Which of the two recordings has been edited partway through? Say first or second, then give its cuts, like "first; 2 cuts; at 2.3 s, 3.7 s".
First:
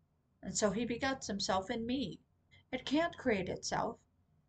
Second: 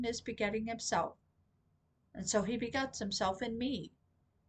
first; 1 cut; at 2.5 s